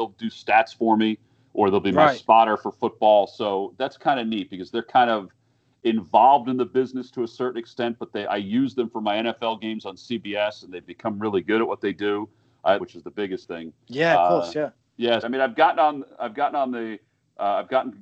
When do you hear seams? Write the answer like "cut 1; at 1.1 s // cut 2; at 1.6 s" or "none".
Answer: cut 1; at 12.8 s // cut 2; at 15.2 s